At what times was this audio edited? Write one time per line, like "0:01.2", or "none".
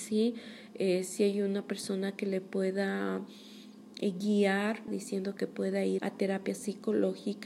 0:04.9
0:06.0